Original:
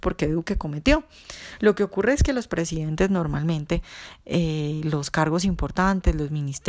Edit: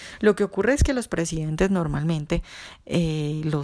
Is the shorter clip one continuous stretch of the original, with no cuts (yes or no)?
yes